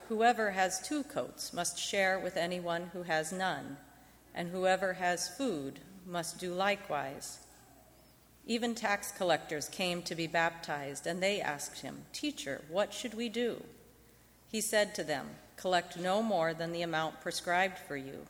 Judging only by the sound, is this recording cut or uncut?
uncut